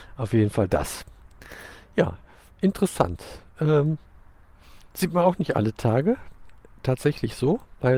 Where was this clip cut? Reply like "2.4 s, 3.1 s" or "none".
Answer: none

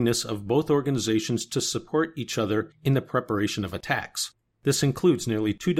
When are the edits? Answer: 4.5 s

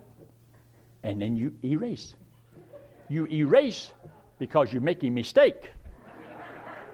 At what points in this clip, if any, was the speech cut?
none

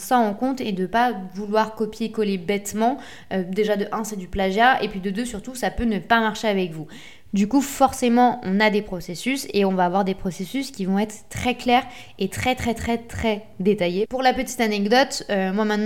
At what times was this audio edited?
7.3 s, 14.0 s

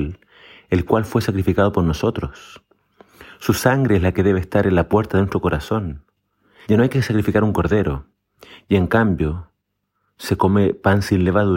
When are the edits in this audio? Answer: 6.6 s

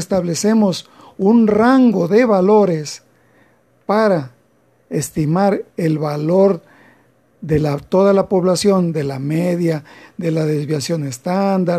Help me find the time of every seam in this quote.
none

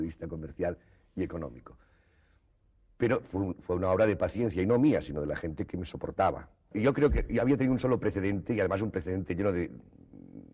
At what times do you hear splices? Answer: 6.7 s

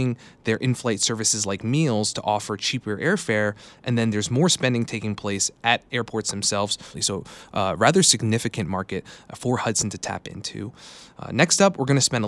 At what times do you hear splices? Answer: 6.9 s

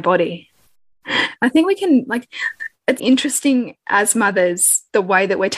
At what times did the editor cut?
1.3 s, 3.0 s

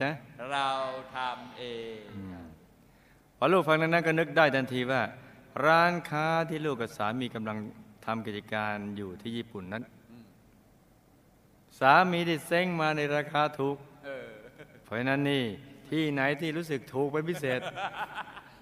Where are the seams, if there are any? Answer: 14.8 s

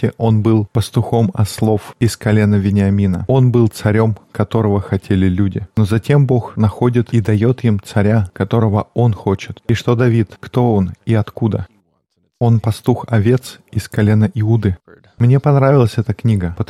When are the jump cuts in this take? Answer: 15.2 s

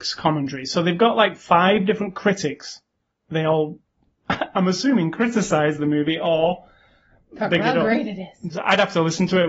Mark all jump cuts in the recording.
3.1 s, 8.5 s

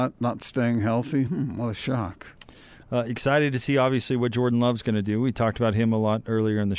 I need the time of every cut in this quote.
none

